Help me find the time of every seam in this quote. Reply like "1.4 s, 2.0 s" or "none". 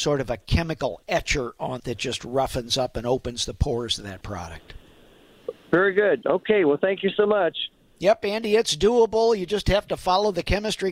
1.8 s

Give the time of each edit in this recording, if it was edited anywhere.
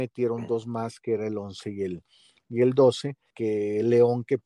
3.3 s

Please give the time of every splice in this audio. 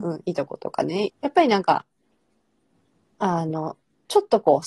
1.1 s

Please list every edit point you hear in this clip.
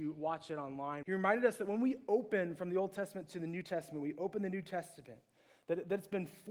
1.0 s

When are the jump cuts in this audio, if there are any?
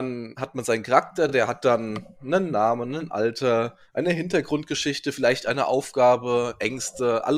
none

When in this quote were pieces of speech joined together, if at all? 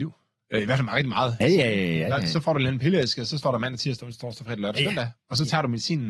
1.4 s

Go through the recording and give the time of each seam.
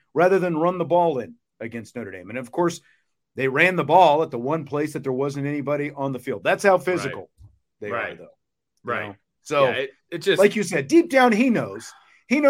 none

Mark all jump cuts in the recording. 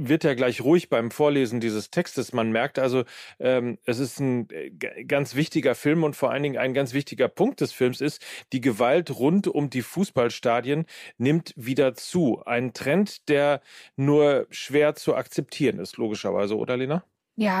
none

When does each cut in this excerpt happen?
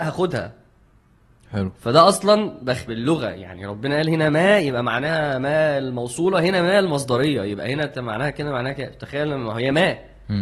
2.9 s

